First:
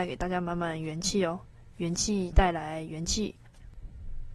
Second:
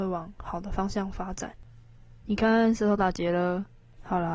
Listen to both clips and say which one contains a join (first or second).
second